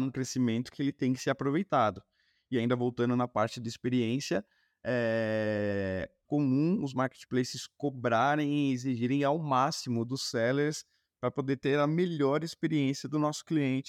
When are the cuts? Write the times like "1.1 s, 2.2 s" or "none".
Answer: 6.3 s